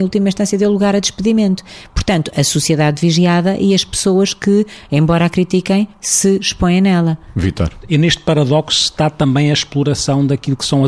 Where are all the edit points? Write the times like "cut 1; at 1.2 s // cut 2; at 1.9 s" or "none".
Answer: none